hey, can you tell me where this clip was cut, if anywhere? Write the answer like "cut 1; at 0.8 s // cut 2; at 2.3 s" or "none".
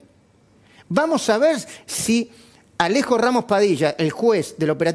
none